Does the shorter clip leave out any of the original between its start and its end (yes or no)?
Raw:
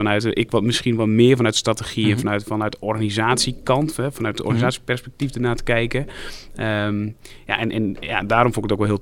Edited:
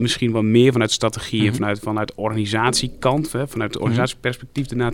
no